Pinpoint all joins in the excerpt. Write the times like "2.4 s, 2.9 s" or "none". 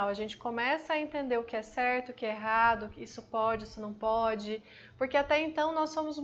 none